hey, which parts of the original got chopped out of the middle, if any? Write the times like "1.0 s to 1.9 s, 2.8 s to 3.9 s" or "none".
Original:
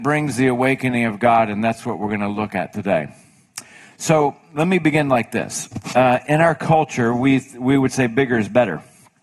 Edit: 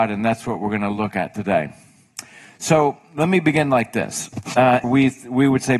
6.2 s to 7.1 s